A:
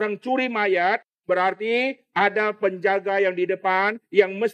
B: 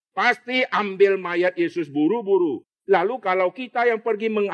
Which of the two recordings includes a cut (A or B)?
B